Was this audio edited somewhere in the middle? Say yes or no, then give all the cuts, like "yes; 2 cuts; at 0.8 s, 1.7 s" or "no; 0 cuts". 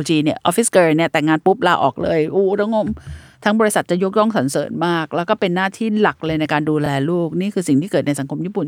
no; 0 cuts